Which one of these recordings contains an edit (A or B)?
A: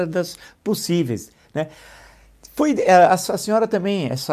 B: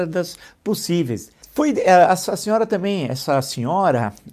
B